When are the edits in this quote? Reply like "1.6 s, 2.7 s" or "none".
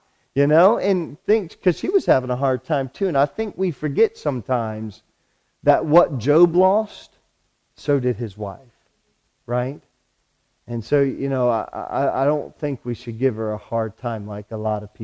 none